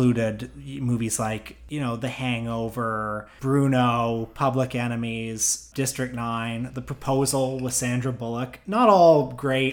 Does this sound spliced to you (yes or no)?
no